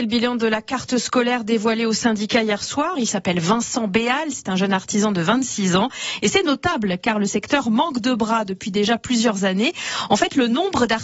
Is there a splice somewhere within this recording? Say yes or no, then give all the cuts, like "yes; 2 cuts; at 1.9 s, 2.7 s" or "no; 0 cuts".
yes; 1 cut; at 3.0 s